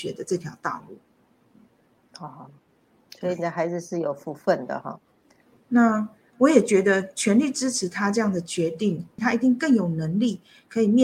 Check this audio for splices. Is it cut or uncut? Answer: cut